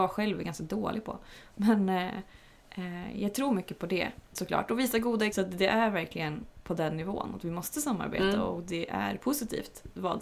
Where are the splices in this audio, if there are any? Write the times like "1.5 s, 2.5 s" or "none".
5.3 s